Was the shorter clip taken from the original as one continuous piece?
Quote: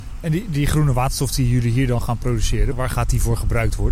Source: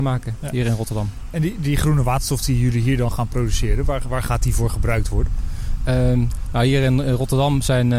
no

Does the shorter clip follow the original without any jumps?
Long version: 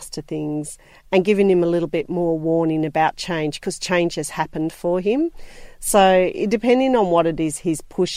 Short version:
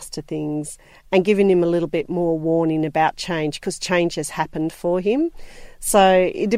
yes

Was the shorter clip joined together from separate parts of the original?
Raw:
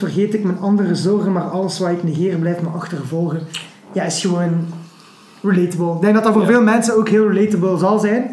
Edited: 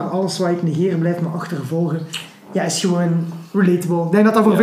yes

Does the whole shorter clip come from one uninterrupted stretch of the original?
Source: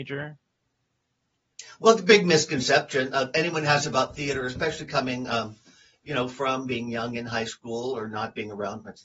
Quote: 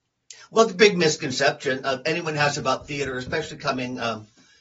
yes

